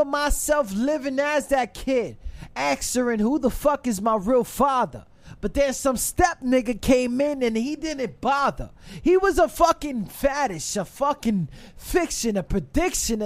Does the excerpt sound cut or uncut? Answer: uncut